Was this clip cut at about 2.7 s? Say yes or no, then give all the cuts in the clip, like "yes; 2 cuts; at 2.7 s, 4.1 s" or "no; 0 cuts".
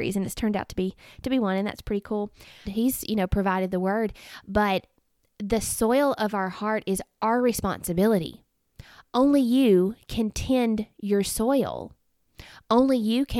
yes; 1 cut; at 2.7 s